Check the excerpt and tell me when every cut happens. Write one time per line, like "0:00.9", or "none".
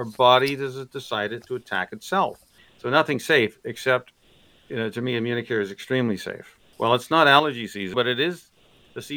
0:02.6
0:06.7
0:07.9